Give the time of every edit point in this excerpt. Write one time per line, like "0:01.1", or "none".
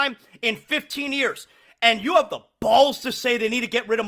none